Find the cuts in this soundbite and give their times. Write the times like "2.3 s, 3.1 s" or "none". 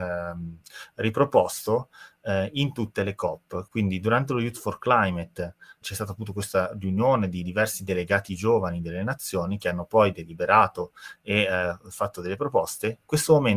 3.7 s, 5.8 s